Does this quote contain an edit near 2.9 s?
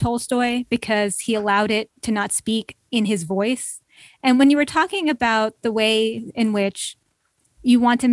yes; 1 cut; at 2.9 s

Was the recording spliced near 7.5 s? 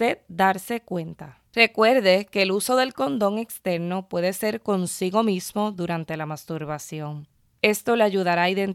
no; 1 cut; at 1.5 s

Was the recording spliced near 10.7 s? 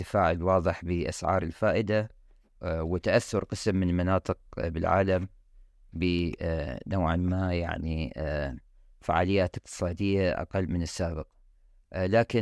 yes; 1 cut; at 10.7 s

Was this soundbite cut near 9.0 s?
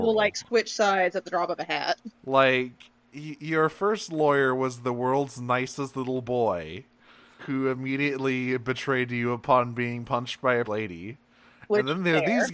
no; 3 cuts; at 2.2 s, 7.4 s, 10.7 s

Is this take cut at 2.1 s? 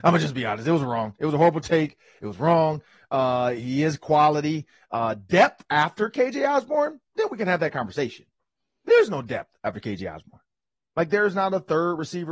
no; 0 cuts

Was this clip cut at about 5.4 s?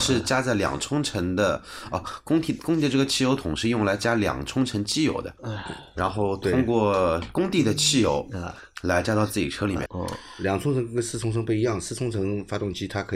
yes; 2 cuts; at 5.4 s, 9.9 s

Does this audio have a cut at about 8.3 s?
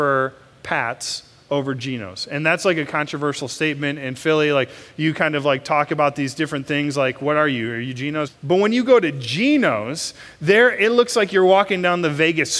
yes; 1 cut; at 8.3 s

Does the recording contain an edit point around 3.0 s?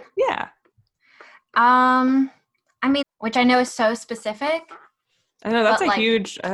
yes; 1 cut; at 3.0 s

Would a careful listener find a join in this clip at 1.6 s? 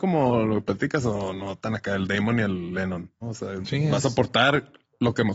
no; 1 cut; at 3.2 s

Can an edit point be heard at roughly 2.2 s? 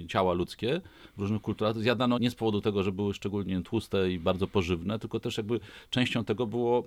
yes; 1 cut; at 2.2 s

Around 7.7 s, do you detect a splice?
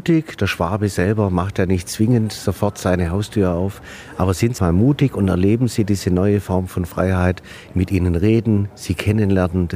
yes; 2 cuts; at 4.6 s, 7.7 s

